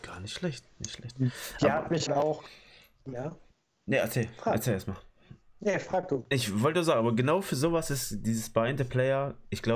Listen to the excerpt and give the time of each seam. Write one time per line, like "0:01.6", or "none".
0:02.1

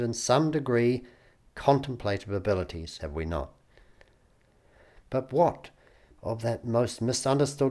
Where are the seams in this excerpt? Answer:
0:03.0

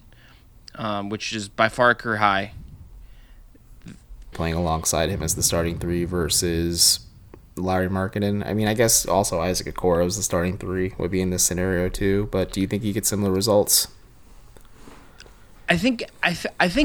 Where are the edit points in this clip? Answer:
0:04.3

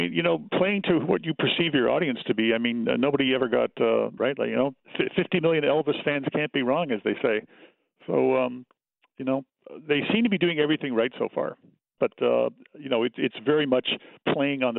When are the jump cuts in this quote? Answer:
0:04.2
0:12.0

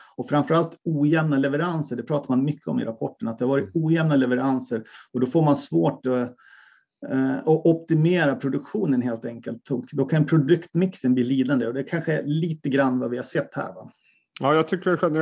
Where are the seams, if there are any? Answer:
none

